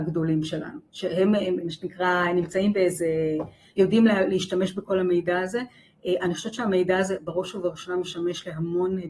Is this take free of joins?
no; 1 cut; at 1.6 s

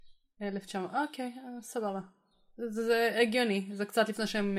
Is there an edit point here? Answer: no; 0 cuts

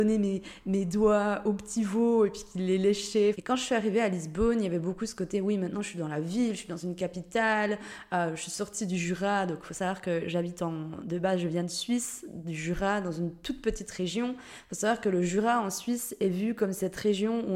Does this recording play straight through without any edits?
no; 1 cut; at 3.3 s

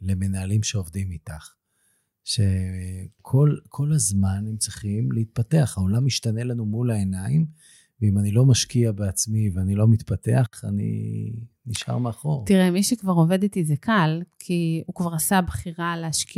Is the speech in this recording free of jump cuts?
yes; 0 cuts

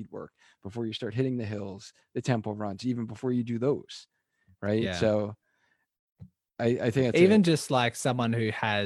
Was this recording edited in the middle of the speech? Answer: no; 0 cuts

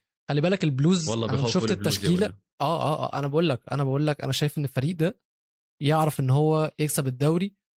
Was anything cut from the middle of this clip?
no; 0 cuts

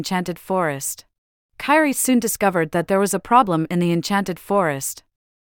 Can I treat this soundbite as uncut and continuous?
no; 1 cut; at 1.4 s

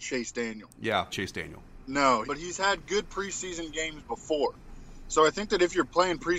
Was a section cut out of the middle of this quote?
yes; 2 cuts; at 1.1 s, 2.2 s

